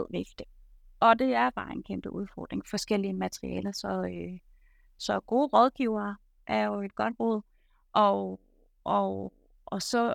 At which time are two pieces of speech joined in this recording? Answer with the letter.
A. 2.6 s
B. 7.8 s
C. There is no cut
A